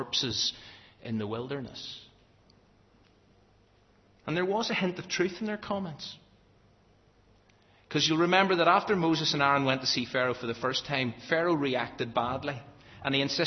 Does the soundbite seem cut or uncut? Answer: uncut